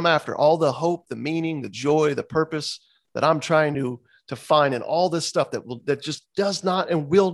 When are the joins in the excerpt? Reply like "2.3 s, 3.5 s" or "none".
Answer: none